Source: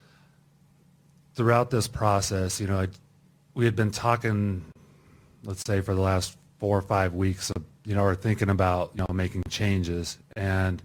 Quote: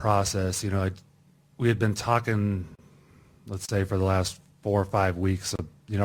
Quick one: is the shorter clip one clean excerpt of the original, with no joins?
yes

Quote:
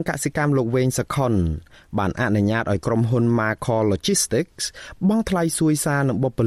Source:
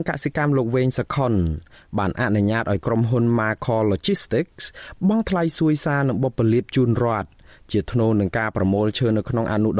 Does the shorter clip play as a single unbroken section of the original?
yes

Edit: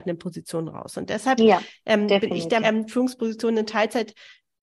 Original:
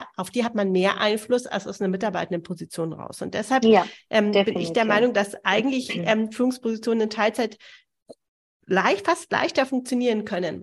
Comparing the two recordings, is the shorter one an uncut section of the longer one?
no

